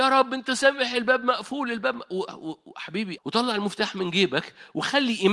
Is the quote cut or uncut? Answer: cut